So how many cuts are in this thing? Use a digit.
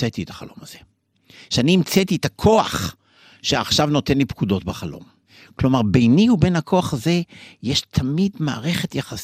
0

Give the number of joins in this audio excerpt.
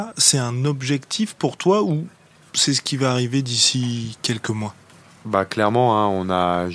0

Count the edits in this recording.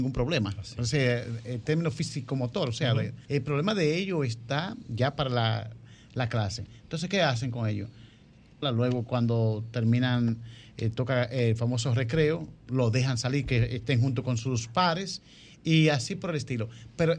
2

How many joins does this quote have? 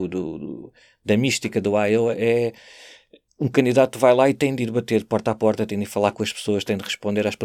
0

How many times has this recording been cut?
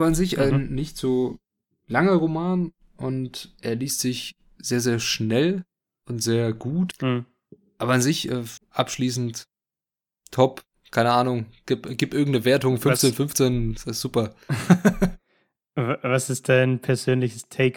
2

